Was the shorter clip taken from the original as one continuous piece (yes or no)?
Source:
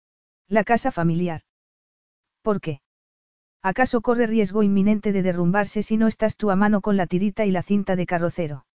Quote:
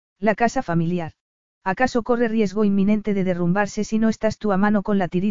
no